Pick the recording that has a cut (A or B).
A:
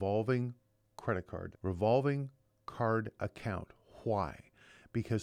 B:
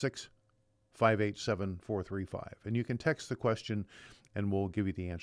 A